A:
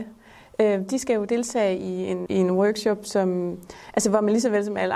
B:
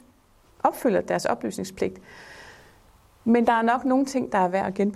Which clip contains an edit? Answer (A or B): A